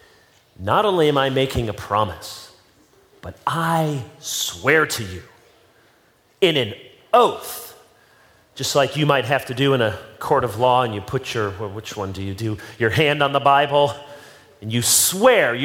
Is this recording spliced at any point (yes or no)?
no